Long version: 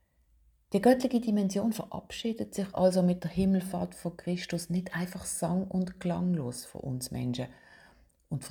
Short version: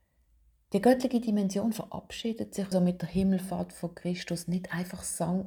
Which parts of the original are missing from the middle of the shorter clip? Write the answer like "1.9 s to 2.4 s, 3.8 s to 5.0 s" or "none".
2.7 s to 2.9 s